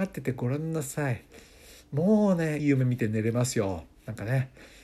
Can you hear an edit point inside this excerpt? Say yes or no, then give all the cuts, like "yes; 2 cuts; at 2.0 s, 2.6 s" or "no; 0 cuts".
yes; 1 cut; at 2.6 s